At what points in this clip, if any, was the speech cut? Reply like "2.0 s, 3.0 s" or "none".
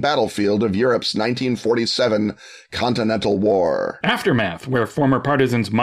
none